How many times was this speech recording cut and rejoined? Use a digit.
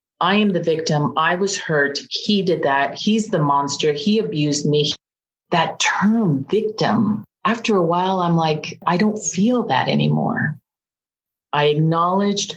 0